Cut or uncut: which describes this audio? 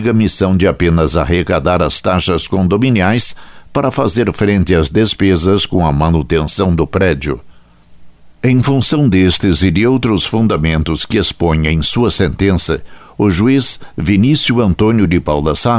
cut